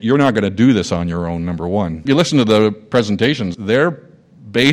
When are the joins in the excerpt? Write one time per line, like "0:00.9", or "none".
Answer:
0:02.1
0:03.5